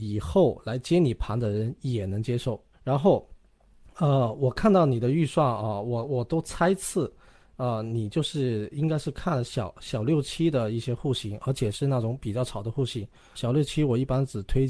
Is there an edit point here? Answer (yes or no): yes